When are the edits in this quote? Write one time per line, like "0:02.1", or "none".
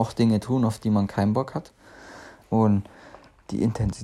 0:02.4

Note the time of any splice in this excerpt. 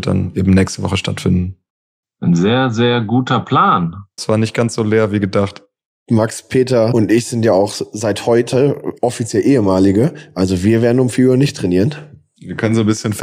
0:04.2

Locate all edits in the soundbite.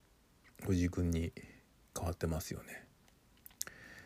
none

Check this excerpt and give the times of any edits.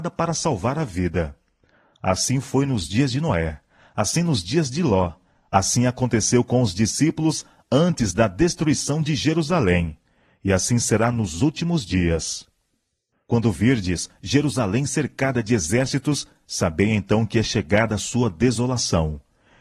0:13.1

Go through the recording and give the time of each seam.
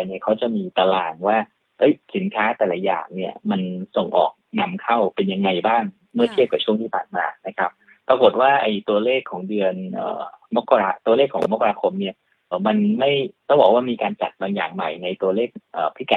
0:12.5

